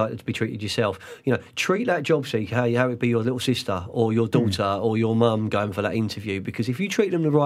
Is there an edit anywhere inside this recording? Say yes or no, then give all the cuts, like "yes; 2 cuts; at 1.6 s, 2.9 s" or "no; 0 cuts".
no; 0 cuts